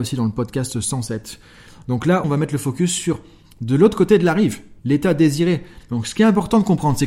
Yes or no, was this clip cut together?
yes